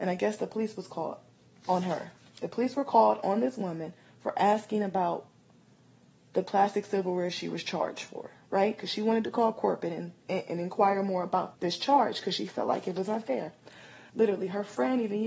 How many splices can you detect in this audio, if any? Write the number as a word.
two